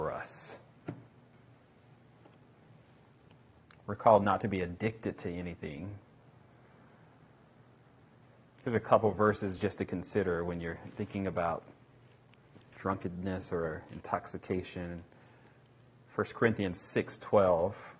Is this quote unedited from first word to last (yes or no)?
yes